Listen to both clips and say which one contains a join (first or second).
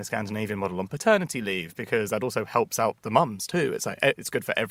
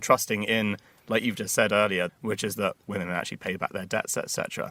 second